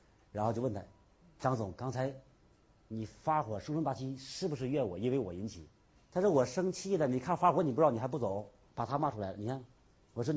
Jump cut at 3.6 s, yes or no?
no